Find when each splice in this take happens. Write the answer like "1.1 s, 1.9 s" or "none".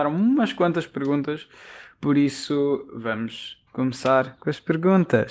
none

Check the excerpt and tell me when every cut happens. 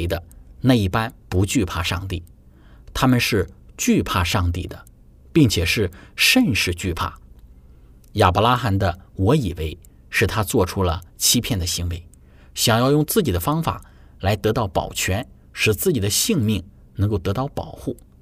none

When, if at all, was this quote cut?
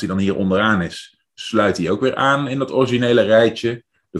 none

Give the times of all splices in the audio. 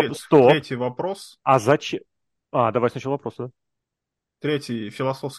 none

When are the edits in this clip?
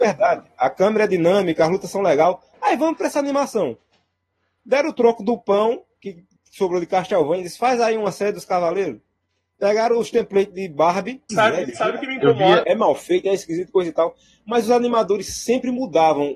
11.3 s, 12.6 s

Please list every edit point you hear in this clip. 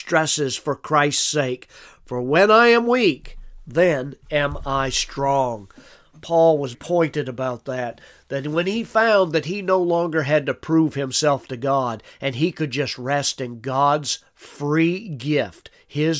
6.7 s

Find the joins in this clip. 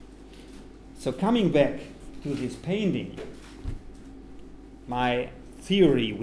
none

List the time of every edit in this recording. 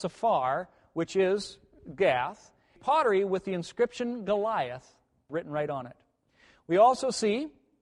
none

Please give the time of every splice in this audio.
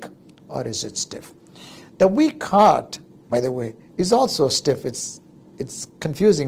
none

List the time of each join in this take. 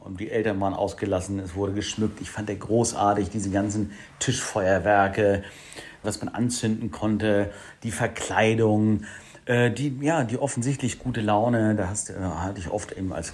6.0 s

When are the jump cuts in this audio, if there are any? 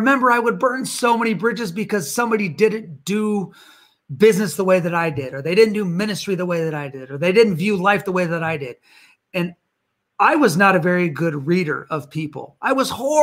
none

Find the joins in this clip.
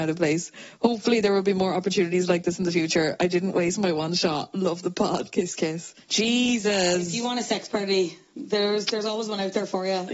6.0 s

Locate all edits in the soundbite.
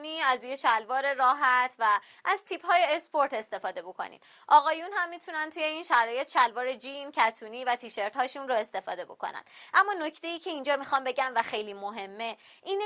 11.4 s

